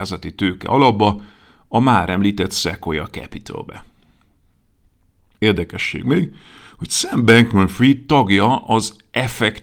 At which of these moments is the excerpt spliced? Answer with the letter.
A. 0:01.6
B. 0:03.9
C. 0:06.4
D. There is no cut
D